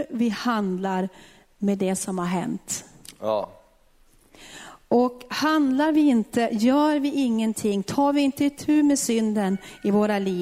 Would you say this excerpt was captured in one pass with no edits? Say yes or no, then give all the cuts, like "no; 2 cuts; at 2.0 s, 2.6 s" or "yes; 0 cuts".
yes; 0 cuts